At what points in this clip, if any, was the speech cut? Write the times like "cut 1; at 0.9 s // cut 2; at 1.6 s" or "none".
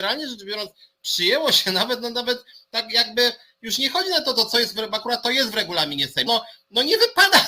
cut 1; at 6.3 s